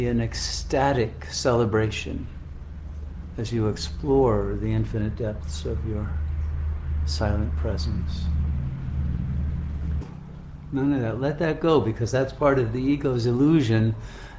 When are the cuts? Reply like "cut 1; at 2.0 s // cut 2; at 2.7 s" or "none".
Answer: cut 1; at 10.0 s